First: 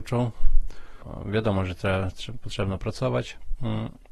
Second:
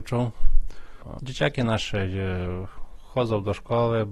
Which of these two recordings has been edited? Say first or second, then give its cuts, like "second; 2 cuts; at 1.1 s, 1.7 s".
second; 2 cuts; at 1.2 s, 3.0 s